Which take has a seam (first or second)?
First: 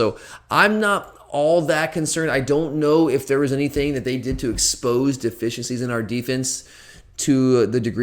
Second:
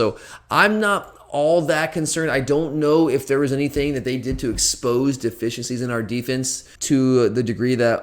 second